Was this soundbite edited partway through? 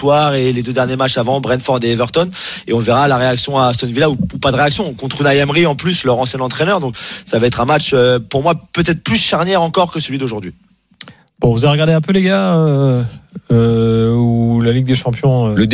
no; 0 cuts

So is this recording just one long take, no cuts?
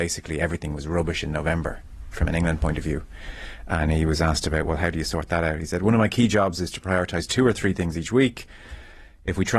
yes; 0 cuts

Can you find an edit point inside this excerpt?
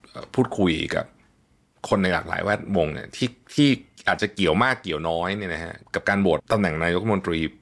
yes; 1 cut; at 6.4 s

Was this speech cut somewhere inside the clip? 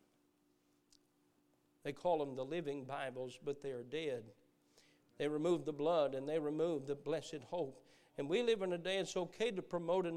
no; 0 cuts

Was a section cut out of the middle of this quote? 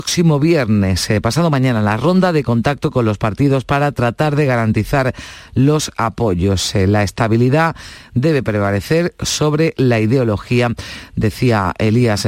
no; 0 cuts

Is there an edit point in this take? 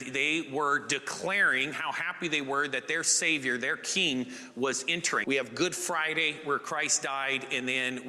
yes; 1 cut; at 5.2 s

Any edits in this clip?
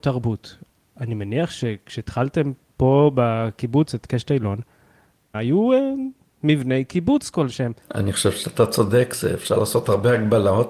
yes; 2 cuts; at 5.3 s, 7.8 s

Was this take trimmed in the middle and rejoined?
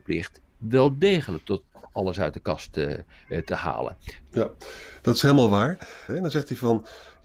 yes; 2 cuts; at 4.2 s, 6.1 s

